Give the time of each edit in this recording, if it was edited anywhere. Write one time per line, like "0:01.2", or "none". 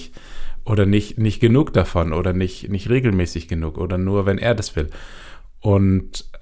0:01.1